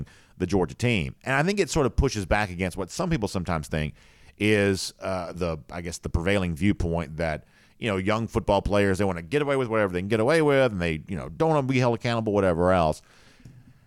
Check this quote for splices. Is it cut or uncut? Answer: cut